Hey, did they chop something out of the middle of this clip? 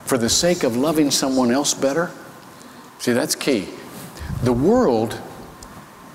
yes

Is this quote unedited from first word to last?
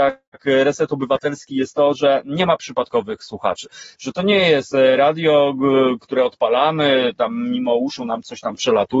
yes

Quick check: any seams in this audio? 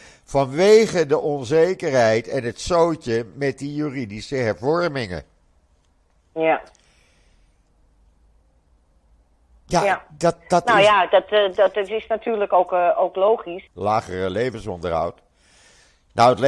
yes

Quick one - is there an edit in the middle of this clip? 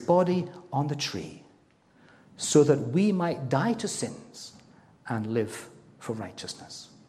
no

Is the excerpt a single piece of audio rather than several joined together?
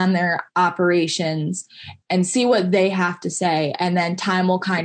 no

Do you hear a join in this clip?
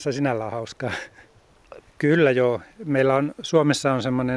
yes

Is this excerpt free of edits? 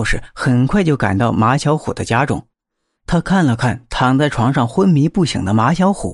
yes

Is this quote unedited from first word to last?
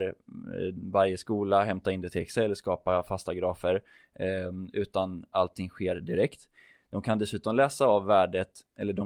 yes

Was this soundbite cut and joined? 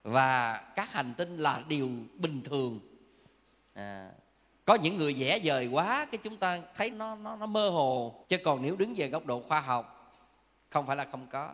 yes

